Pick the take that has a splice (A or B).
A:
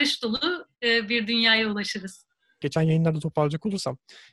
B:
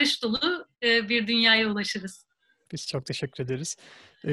A